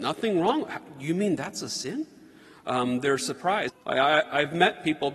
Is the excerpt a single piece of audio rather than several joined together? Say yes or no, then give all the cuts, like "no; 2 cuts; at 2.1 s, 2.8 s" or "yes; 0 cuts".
no; 1 cut; at 3.7 s